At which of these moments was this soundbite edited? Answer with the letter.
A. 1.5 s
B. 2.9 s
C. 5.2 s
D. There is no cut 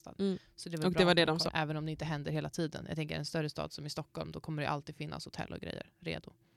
A